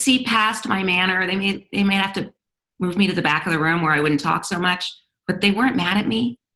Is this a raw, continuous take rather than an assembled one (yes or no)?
yes